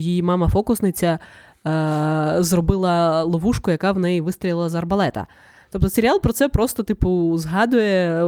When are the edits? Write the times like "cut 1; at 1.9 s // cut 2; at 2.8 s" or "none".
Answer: none